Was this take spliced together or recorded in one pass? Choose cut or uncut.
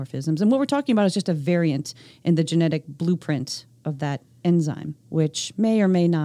cut